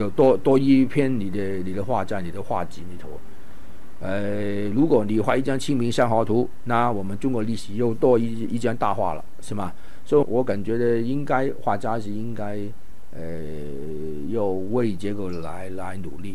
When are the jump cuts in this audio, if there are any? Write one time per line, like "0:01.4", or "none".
0:10.2